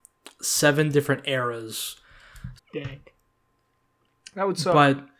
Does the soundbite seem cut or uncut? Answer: cut